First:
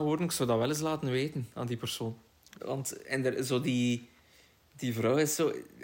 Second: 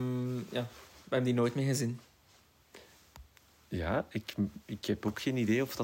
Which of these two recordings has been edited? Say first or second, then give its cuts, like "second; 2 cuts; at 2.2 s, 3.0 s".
first; 1 cut; at 2.6 s